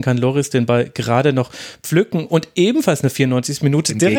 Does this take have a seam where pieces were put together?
no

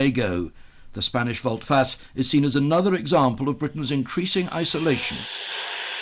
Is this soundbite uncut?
yes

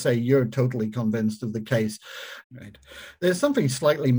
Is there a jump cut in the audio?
yes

